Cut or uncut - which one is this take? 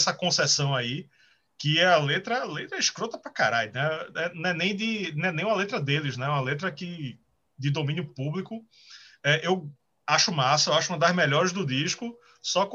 uncut